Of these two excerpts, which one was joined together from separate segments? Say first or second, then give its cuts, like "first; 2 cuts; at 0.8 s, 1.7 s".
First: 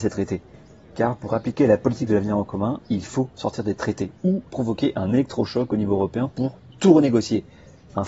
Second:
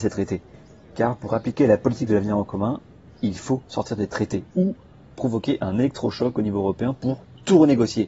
first; 2 cuts; at 2.8 s, 4.5 s